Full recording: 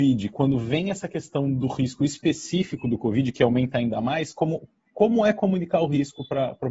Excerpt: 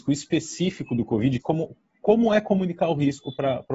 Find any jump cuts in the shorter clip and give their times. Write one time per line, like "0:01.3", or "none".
0:01.4